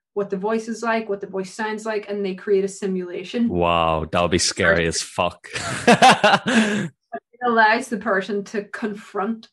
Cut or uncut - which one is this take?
uncut